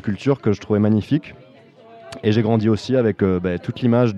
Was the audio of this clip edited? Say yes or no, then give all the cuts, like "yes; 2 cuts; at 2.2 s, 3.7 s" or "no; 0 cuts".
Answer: no; 0 cuts